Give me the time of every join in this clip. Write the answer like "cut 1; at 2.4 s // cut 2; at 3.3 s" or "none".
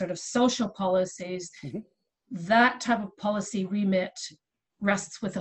none